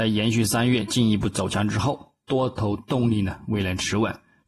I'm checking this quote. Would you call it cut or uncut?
uncut